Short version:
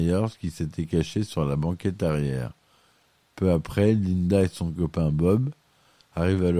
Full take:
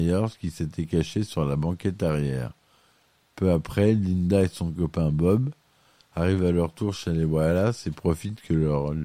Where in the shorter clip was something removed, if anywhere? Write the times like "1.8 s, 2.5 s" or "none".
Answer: none